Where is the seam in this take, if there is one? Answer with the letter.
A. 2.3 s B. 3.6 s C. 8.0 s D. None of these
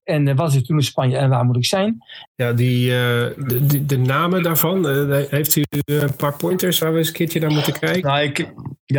A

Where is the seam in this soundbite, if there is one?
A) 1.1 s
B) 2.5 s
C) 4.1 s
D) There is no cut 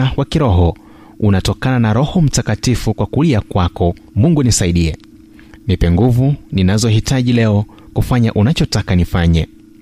C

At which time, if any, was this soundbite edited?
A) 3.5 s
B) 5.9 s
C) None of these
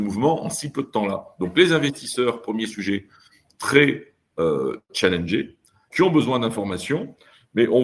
B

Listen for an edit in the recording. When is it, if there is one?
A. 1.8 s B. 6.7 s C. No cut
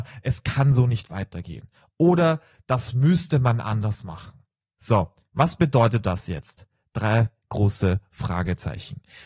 C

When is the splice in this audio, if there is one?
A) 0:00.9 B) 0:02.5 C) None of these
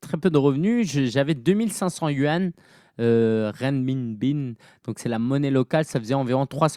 C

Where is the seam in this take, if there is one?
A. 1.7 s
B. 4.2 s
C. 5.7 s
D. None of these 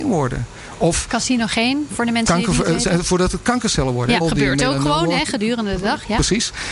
B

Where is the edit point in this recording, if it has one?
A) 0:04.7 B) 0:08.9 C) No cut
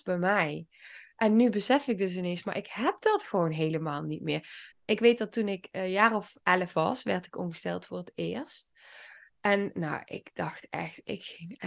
A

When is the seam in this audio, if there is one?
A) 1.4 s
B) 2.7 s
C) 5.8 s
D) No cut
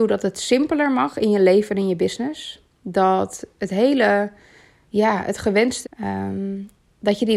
C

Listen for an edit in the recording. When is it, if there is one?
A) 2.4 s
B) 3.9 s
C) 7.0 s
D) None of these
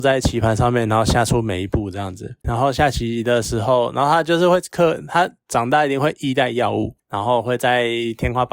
A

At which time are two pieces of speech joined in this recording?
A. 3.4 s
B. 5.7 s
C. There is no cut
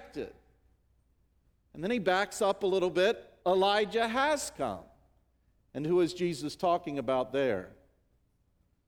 A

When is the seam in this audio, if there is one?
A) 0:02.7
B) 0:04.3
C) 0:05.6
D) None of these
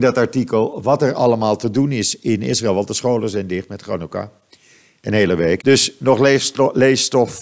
C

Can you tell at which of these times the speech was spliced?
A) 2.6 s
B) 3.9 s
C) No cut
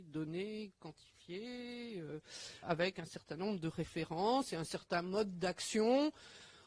A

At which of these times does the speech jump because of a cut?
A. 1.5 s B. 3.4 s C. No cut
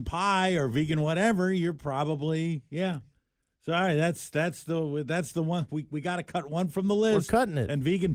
C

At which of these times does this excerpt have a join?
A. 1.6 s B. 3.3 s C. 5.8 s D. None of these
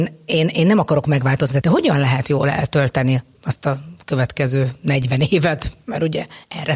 A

